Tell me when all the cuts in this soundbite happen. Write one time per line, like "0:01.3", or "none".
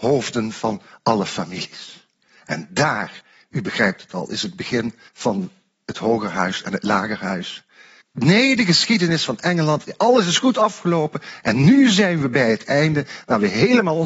0:05.1
0:08.0